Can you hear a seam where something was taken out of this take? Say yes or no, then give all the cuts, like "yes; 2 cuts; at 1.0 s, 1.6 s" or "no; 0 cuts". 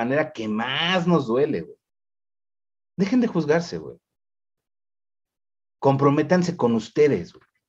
no; 0 cuts